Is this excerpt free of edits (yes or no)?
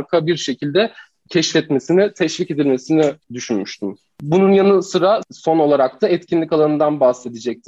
no